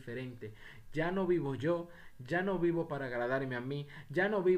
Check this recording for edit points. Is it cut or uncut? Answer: uncut